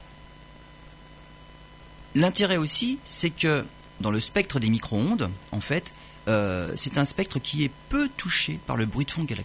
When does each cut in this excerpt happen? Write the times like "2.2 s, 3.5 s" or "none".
4.0 s